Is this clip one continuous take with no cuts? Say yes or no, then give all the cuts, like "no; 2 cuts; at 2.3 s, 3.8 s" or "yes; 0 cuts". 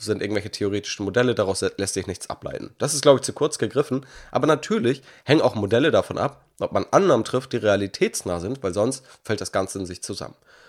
yes; 0 cuts